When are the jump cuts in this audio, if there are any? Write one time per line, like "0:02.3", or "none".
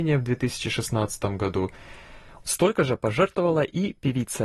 0:02.4